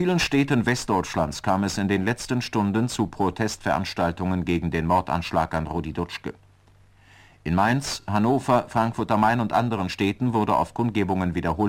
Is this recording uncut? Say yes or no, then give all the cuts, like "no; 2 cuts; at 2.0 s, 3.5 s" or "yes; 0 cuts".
yes; 0 cuts